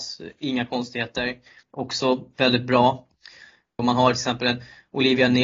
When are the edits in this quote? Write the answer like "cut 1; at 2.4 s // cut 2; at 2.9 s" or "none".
cut 1; at 1.6 s // cut 2; at 3.8 s